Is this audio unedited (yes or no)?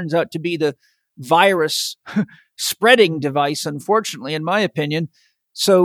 yes